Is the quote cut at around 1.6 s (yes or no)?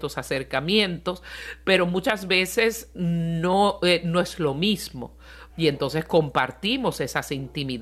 no